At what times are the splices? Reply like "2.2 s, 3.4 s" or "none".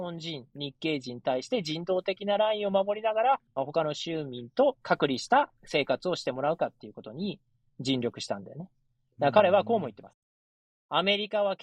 none